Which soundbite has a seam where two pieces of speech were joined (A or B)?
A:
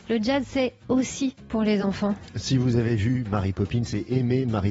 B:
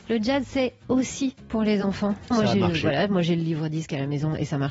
B